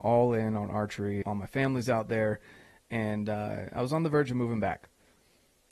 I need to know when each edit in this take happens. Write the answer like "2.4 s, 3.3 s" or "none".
1.2 s